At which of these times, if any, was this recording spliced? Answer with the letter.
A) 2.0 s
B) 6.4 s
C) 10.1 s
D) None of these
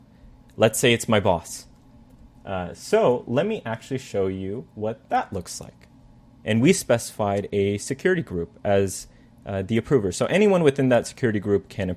B